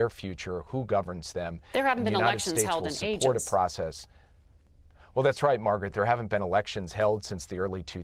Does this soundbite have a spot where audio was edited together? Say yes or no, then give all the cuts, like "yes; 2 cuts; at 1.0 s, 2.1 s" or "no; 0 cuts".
no; 0 cuts